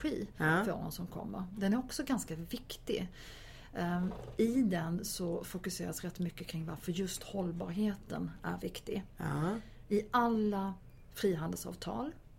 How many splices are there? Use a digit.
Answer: 0